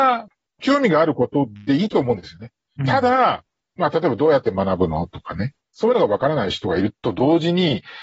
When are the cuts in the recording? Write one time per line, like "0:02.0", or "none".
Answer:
0:02.7